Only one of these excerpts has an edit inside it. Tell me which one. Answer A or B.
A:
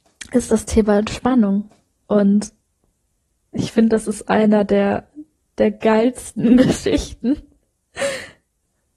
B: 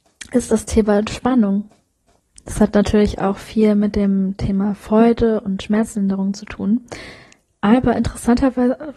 A